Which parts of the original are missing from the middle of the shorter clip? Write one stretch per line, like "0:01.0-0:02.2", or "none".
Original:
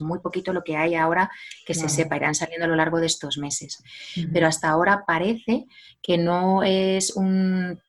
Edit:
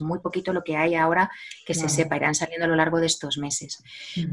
none